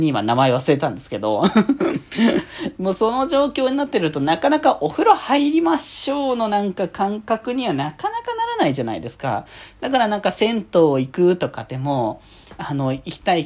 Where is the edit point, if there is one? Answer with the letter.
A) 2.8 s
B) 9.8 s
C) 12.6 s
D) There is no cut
D